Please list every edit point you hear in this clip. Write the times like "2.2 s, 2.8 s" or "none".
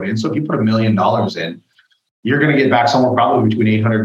none